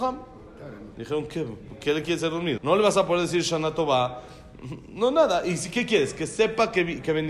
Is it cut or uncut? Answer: cut